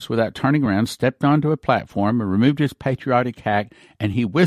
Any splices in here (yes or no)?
no